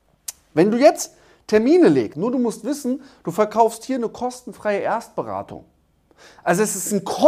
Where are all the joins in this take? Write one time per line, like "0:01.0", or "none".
0:02.1